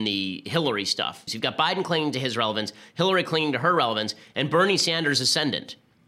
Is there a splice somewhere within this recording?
yes; 1 cut; at 1.3 s

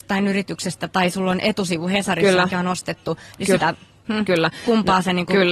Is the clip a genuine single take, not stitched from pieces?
no; 1 cut; at 3.6 s

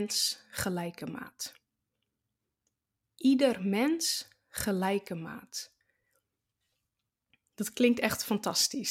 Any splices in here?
no; 0 cuts

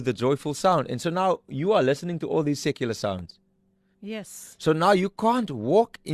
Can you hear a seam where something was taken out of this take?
yes; 1 cut; at 3.9 s

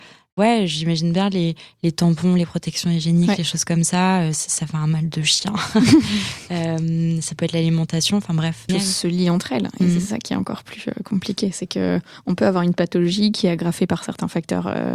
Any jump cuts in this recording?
yes; 1 cut; at 8.7 s

